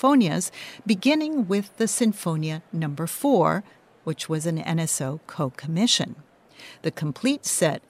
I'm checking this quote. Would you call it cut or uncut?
uncut